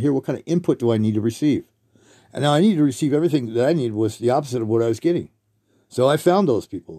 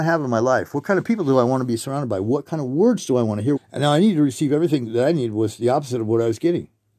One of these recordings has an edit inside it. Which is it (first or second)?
second